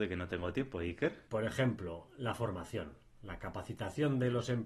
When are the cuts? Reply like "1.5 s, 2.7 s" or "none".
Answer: 1.3 s